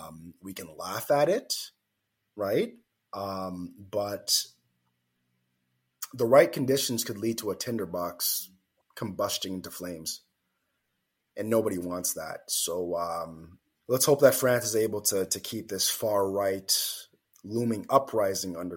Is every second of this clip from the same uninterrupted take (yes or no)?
no